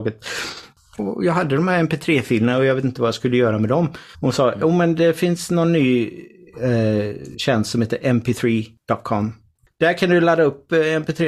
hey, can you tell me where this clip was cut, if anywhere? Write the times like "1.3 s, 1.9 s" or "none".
4.1 s